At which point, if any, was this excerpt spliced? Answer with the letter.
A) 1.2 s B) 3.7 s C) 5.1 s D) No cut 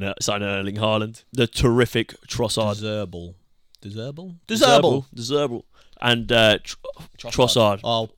A